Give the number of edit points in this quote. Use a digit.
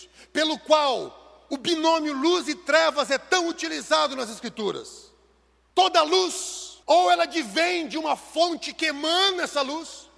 2